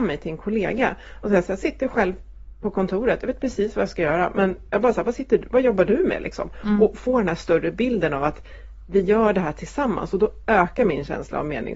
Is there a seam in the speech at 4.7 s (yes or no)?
yes